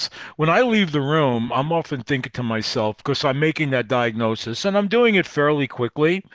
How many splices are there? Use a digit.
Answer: 0